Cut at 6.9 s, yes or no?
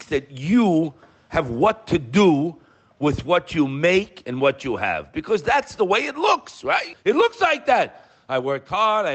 yes